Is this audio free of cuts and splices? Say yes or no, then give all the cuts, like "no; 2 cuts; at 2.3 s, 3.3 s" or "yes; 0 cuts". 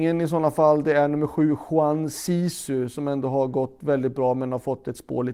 yes; 0 cuts